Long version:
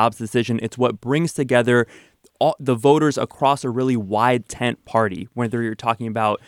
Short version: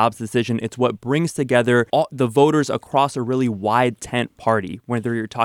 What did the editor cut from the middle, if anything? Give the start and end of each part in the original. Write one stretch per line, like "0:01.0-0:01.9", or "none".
0:01.9-0:02.4